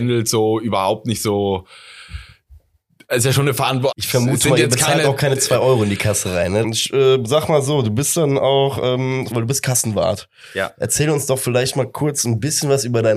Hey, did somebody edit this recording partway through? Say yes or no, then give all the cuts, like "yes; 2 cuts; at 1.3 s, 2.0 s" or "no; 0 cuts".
yes; 3 cuts; at 3.9 s, 6.6 s, 9.3 s